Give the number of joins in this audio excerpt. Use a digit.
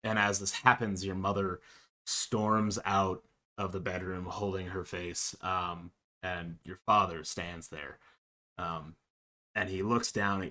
1